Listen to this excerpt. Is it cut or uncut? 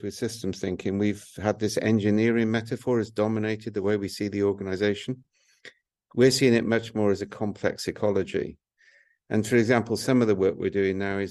uncut